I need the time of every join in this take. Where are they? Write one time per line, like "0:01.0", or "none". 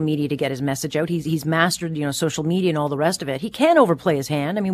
none